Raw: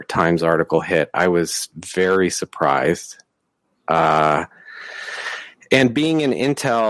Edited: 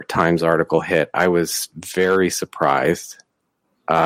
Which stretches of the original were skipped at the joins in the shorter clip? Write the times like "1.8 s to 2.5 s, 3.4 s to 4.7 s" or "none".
none